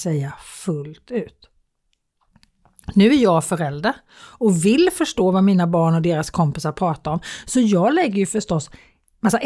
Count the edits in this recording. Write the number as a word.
zero